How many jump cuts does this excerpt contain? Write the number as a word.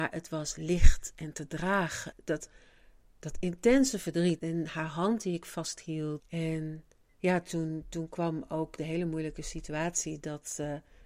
three